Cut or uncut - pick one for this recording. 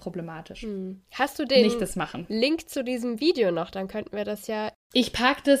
uncut